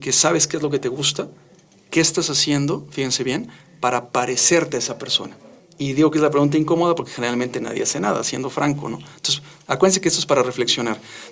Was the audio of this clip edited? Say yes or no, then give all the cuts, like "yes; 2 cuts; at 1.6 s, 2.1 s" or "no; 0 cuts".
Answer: no; 0 cuts